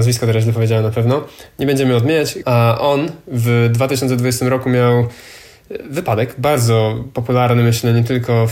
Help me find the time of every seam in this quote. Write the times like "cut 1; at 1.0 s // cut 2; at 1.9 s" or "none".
cut 1; at 2.4 s